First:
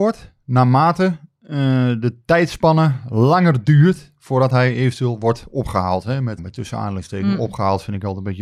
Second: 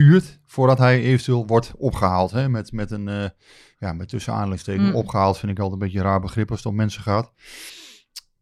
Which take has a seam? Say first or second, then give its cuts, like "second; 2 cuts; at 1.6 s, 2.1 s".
first; 1 cut; at 6.4 s